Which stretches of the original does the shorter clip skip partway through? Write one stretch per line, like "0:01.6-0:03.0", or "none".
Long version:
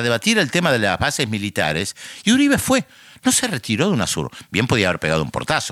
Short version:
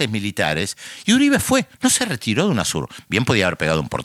0:02.9-0:03.2

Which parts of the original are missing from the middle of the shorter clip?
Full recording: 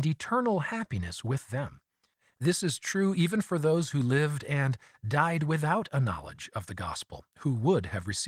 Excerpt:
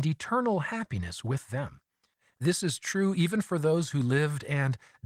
none

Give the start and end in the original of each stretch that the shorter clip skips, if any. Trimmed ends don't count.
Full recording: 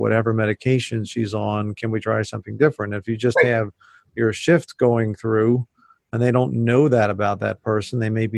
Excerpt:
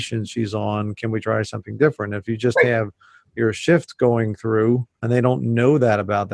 0:05.7-0:06.0

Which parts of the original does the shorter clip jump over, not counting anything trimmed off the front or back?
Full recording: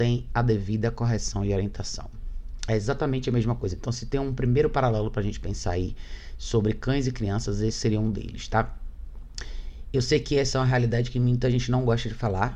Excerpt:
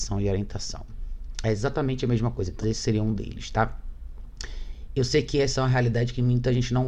0:03.8-0:07.6

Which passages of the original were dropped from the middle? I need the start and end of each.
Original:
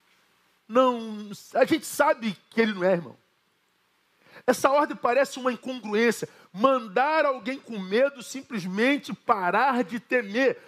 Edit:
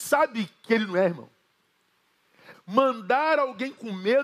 0:04.4-0:06.4

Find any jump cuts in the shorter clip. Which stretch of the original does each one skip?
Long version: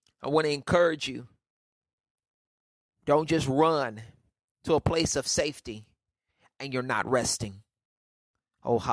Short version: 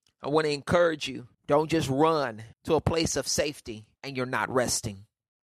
0:01.3-0:02.9
0:04.1-0:04.5
0:05.9-0:06.5

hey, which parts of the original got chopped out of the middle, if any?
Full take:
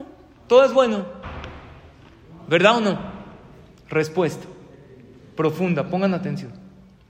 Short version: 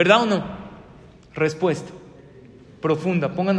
none

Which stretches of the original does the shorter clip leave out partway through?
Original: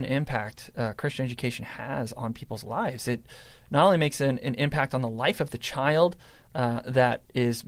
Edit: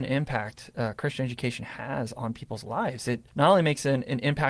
0:03.3-0:03.6

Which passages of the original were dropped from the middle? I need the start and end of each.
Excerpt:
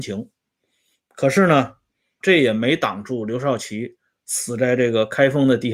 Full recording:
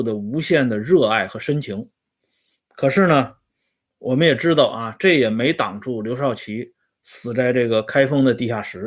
0:03.8-0:05.0

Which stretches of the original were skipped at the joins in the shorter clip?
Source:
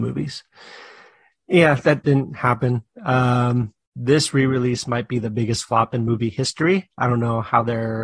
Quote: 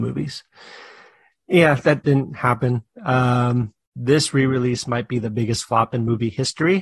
none

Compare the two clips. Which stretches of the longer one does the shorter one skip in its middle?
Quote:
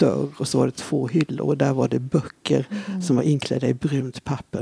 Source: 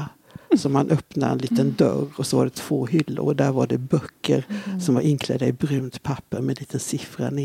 none

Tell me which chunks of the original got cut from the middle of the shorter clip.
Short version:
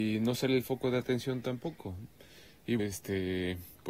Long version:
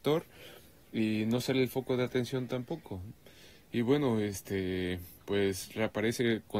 0:03.8-0:04.2

